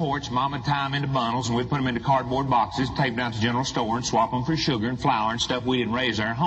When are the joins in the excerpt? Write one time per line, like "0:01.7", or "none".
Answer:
none